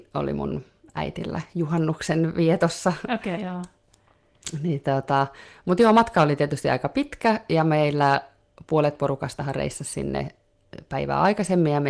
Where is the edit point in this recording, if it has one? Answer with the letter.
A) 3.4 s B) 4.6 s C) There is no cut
A